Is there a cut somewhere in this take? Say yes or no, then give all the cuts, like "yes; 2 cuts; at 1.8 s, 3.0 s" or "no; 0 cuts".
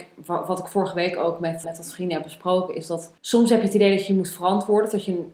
yes; 2 cuts; at 1.6 s, 3.2 s